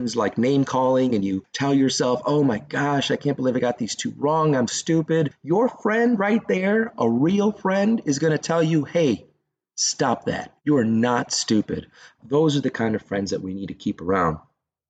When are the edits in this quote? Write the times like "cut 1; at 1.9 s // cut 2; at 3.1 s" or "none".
cut 1; at 4.7 s // cut 2; at 10.6 s // cut 3; at 12.2 s